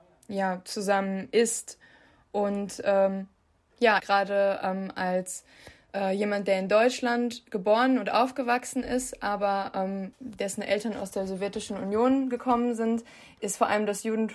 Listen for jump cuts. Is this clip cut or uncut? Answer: cut